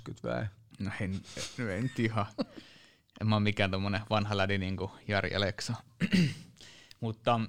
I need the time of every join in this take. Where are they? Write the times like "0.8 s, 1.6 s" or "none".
none